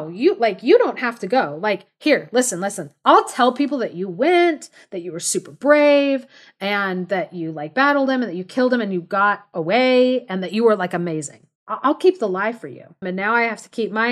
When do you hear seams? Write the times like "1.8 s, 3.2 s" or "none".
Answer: 11.6 s, 13.0 s